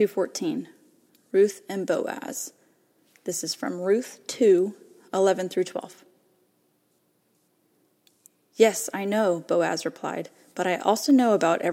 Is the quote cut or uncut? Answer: uncut